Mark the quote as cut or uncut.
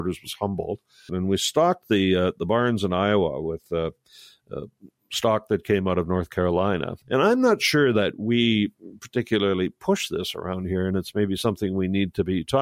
cut